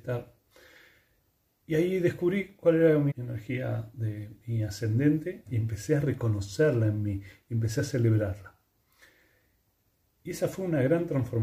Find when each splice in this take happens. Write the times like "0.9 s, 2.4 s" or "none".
3.1 s, 5.5 s